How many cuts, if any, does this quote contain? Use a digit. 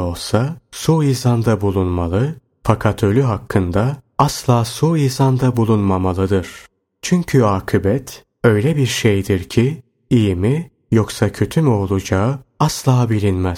0